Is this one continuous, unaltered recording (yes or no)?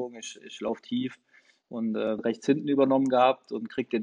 no